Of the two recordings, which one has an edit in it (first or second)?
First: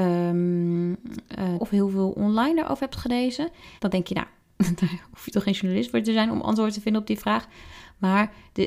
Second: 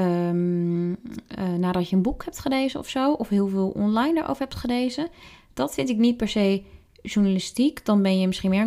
first